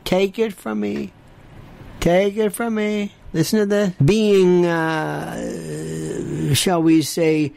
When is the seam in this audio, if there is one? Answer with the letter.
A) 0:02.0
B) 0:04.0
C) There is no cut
B